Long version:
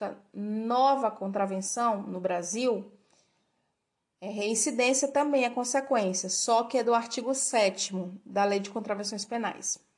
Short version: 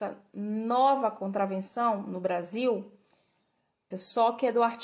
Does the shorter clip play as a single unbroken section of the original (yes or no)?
no